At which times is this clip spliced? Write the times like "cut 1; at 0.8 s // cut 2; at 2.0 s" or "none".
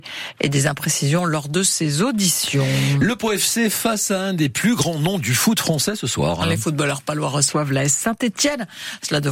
none